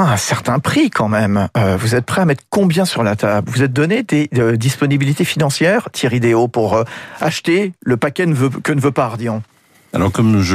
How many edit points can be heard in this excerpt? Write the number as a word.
zero